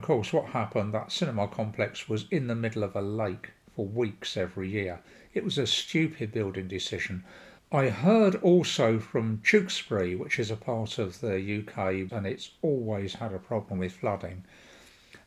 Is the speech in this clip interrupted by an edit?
yes; 2 cuts; at 7.6 s, 12.1 s

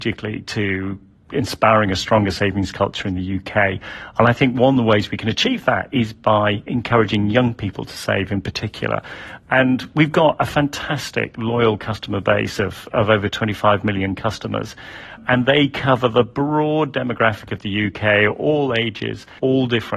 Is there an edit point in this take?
no; 0 cuts

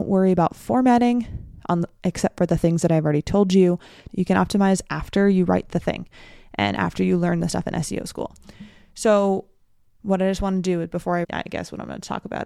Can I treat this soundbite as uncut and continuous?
no; 3 cuts; at 4.1 s, 10.0 s, 11.2 s

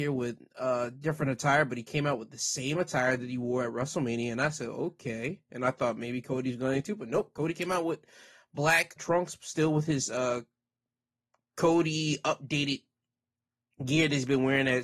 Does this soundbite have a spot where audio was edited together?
yes; 1 cut; at 9.0 s

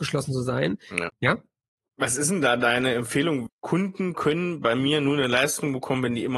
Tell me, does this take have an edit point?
yes; 2 cuts; at 1.1 s, 3.5 s

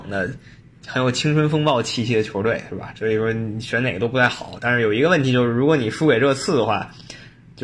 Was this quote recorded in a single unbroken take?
yes; 0 cuts

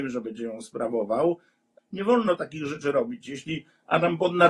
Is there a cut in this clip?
yes; 1 cut; at 1.8 s

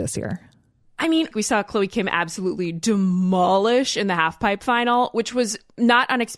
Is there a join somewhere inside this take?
yes; 1 cut; at 1.3 s

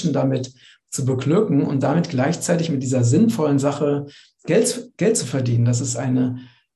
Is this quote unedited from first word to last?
yes; 0 cuts

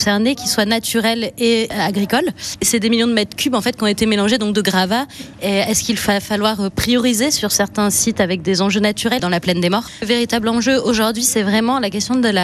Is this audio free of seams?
no; 2 cuts; at 5.3 s, 9.2 s

